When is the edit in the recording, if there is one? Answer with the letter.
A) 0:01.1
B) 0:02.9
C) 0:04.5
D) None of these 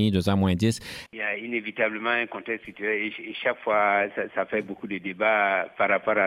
A